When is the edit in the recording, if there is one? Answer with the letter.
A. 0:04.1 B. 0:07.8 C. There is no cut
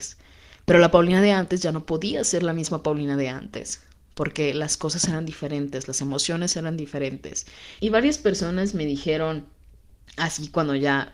B